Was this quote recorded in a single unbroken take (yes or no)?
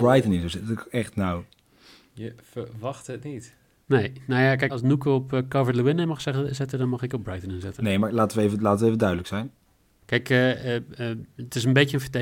no